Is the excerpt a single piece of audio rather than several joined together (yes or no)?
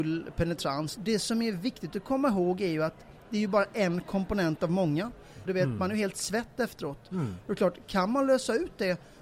no